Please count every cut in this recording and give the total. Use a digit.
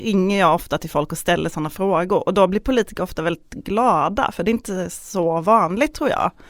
0